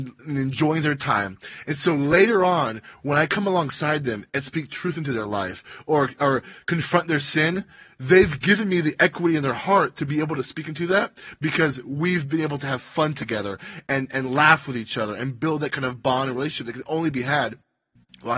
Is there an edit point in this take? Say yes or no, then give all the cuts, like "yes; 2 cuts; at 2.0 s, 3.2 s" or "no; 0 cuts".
no; 0 cuts